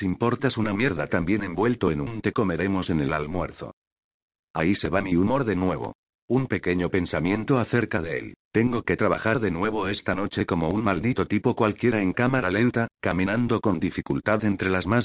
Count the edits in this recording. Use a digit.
2